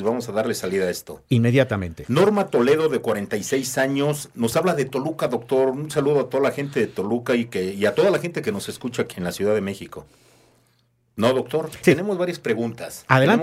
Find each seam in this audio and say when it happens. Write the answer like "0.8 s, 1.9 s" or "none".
9.1 s, 11.8 s